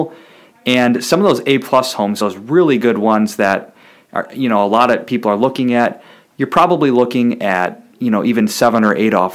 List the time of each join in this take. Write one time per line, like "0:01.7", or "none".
none